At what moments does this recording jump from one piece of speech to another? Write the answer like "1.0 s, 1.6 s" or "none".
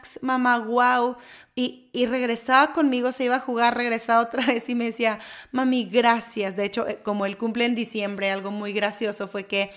none